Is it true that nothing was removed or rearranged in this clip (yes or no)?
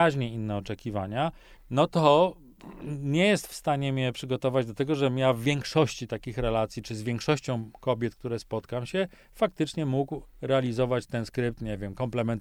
no